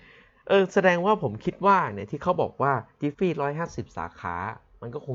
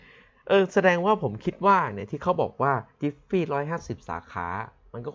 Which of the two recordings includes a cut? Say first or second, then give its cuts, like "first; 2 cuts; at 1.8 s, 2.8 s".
first; 1 cut; at 3.1 s